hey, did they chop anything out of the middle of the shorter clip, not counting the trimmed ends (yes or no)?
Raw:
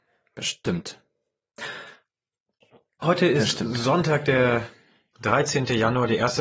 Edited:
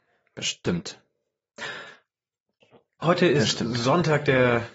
no